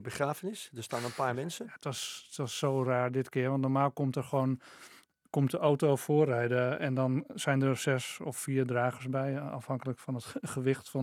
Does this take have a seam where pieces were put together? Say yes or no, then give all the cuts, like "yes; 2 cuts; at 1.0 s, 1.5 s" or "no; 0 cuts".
no; 0 cuts